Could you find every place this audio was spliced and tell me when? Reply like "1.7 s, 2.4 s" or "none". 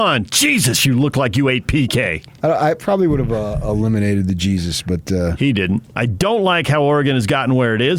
5.9 s